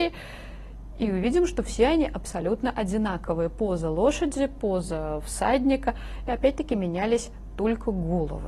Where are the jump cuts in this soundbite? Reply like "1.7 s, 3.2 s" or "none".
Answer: none